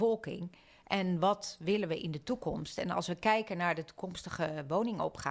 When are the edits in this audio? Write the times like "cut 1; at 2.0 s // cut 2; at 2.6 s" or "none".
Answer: none